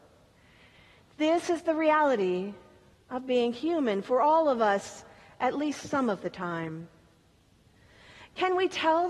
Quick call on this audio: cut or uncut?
uncut